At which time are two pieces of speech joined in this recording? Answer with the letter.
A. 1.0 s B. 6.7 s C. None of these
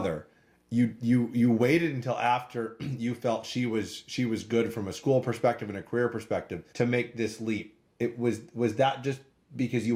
B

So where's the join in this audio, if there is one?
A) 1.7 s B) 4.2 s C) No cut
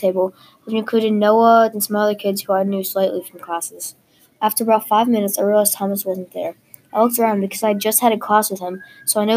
A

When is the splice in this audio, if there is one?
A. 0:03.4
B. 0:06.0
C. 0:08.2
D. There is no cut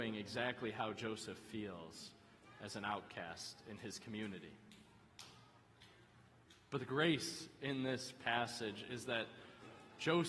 D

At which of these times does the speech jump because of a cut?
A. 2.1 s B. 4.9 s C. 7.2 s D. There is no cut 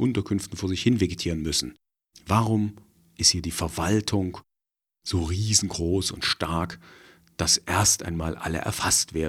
A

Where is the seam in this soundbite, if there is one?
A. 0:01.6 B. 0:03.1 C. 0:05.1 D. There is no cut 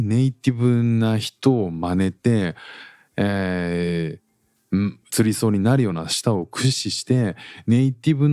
C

